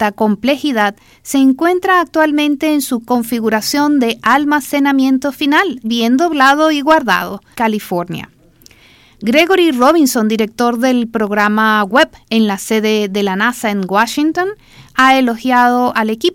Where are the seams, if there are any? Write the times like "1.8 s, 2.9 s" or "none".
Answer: 5.8 s, 7.5 s